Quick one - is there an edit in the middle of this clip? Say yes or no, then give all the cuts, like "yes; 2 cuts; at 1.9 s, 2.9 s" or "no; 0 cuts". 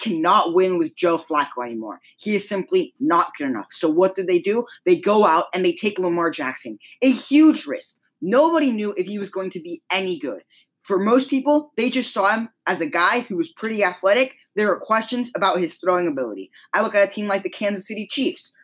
no; 0 cuts